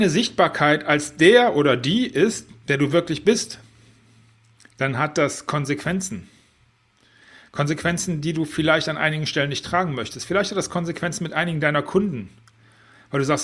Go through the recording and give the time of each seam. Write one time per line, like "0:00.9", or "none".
none